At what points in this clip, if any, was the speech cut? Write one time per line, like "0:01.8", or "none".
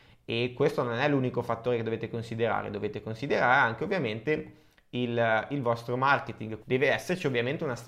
0:06.6